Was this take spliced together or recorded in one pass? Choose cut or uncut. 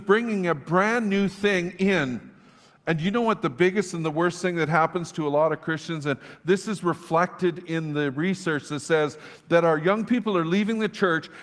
uncut